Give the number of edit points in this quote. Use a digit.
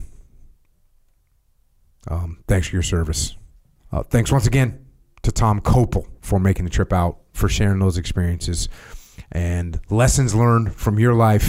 2